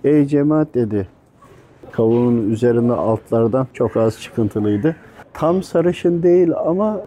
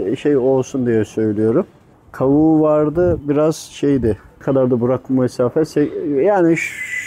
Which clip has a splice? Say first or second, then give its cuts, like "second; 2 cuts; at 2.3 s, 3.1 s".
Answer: first; 2 cuts; at 1.9 s, 3.7 s